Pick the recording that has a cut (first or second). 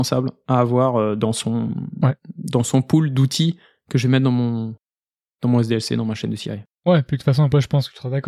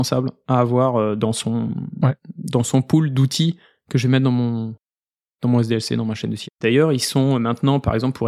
second